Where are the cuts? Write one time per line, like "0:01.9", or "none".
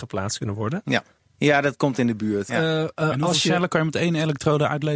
0:01.2
0:02.5

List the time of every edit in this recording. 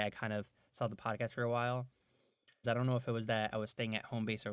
0:02.6

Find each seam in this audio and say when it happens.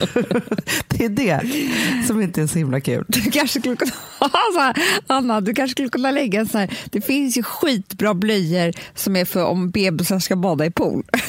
none

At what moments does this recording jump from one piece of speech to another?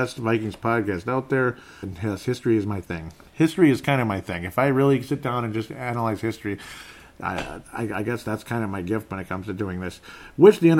0:01.8

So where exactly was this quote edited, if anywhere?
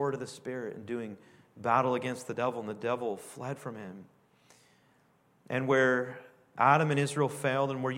none

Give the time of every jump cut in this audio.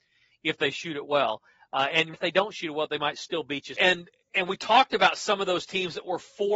0:02.1
0:03.7

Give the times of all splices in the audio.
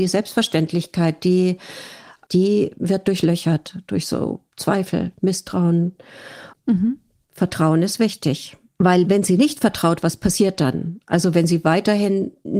0:02.3
0:06.5

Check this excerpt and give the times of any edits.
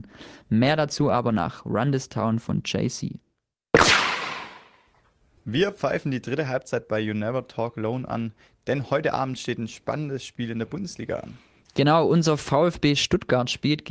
none

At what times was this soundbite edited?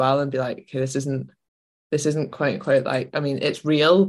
none

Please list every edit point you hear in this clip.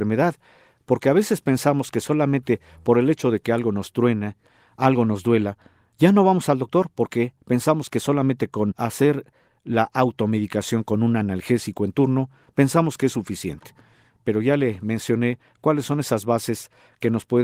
0:08.7

